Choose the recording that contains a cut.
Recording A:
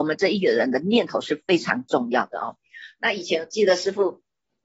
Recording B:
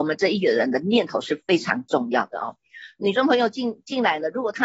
B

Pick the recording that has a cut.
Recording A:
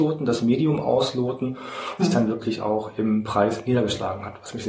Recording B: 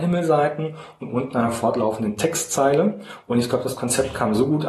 A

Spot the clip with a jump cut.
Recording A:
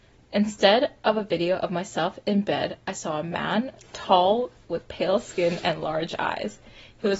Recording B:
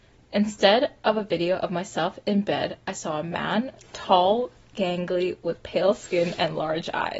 A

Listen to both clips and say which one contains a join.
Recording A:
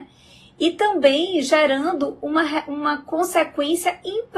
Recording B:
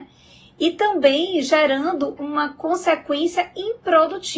B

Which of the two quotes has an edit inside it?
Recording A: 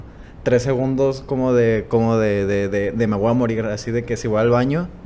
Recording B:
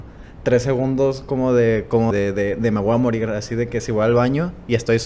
B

